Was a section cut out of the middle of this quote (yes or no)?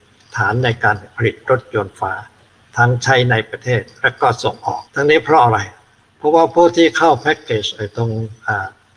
yes